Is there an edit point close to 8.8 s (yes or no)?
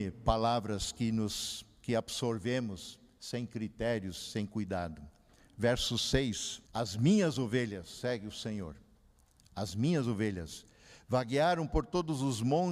no